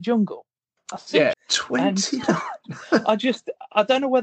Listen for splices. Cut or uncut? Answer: cut